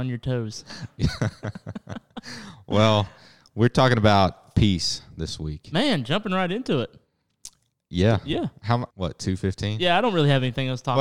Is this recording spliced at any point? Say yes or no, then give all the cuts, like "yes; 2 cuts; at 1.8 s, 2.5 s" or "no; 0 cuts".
yes; 1 cut; at 8.9 s